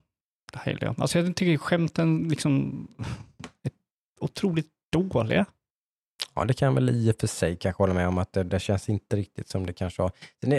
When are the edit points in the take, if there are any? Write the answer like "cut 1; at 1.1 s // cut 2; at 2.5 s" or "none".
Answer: none